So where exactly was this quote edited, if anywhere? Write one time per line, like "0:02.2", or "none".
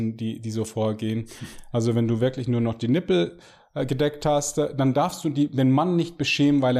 0:01.7